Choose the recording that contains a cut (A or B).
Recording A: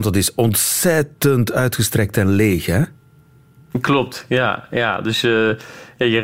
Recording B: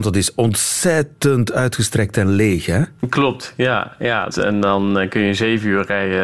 B